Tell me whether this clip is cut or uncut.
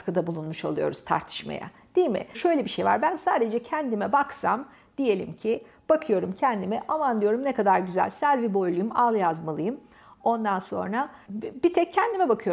uncut